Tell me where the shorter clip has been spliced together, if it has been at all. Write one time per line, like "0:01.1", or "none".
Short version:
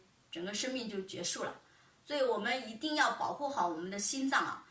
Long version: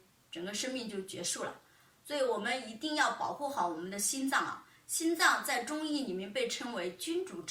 none